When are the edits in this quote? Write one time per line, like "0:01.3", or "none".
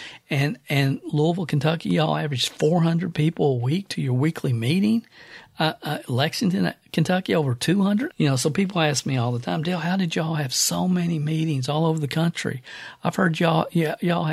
0:08.1